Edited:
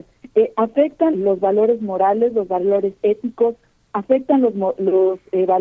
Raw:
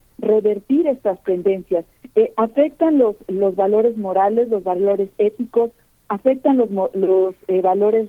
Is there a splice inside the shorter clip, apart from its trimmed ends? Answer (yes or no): yes